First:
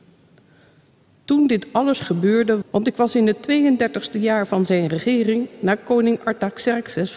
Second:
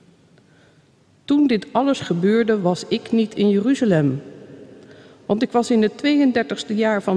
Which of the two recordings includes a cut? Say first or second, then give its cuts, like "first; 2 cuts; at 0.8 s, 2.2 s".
first; 1 cut; at 2.6 s